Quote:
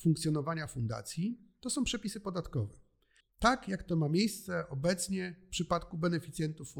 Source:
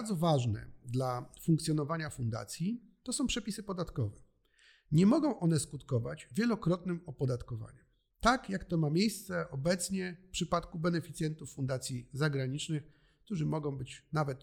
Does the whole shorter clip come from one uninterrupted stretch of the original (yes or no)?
no